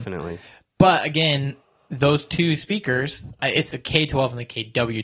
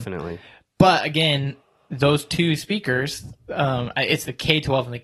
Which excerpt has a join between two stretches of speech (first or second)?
first